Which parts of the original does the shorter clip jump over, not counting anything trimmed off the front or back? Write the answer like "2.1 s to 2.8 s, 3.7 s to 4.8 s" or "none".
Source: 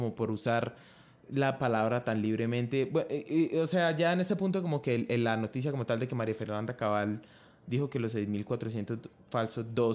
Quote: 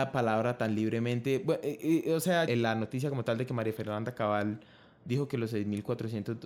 3.9 s to 5.1 s